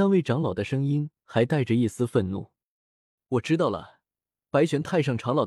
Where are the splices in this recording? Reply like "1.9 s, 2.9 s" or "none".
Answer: 3.2 s

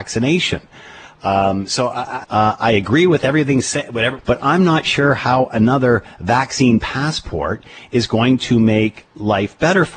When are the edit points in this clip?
2.2 s, 4.2 s

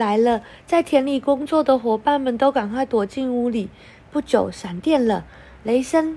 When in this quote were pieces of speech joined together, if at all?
none

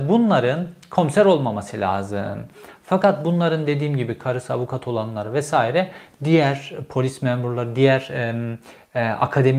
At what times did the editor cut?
none

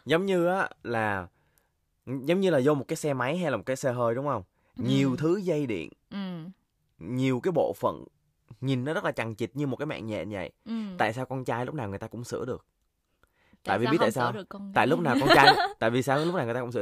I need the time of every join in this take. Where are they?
none

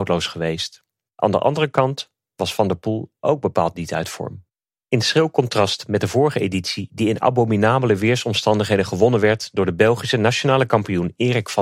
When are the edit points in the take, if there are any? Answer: none

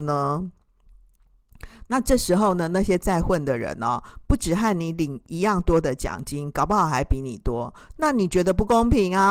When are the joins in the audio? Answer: none

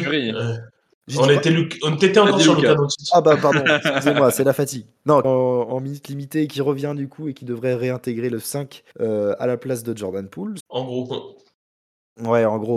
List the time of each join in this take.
5.2 s, 8.9 s, 10.6 s

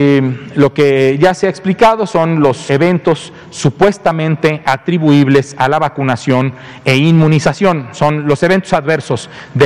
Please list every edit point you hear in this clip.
2.7 s

